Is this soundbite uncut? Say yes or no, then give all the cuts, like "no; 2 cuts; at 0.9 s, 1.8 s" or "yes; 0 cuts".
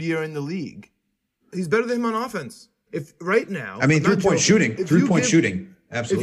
no; 2 cuts; at 1.4 s, 2.9 s